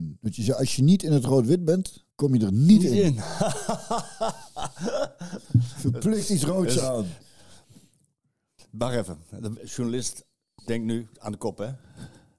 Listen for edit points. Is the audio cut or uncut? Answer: cut